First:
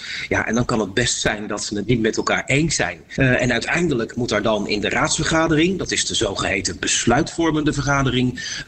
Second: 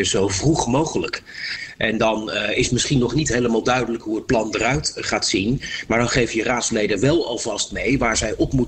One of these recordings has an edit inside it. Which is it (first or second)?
first